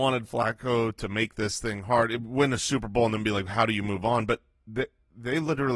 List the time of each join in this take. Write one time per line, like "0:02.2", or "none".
none

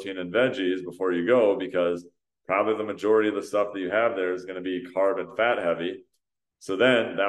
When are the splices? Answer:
none

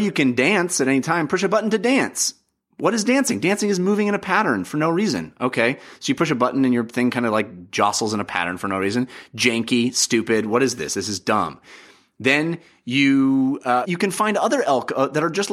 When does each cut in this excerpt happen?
0:13.8

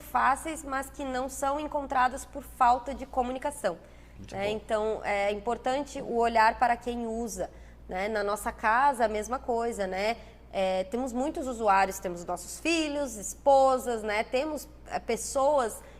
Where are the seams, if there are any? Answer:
none

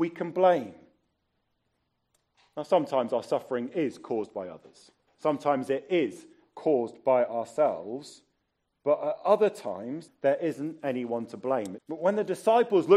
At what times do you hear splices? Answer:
0:10.1
0:11.8

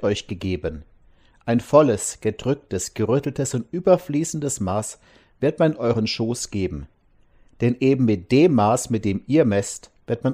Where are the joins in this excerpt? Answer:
none

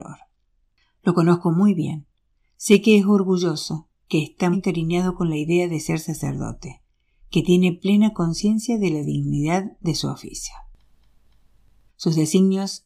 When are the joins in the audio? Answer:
0:04.5
0:11.9

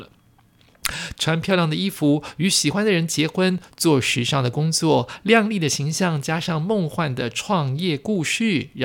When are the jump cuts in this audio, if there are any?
0:01.1

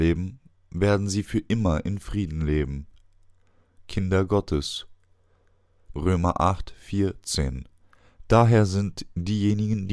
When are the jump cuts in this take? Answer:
0:05.9
0:08.3

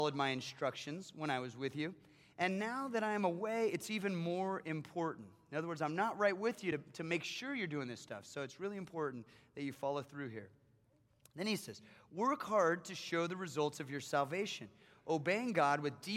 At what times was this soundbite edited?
none

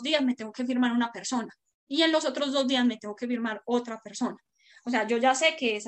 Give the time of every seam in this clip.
none

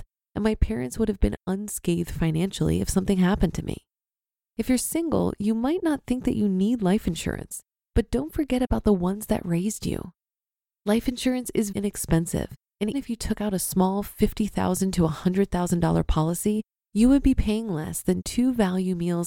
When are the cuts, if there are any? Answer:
0:11.7
0:12.9

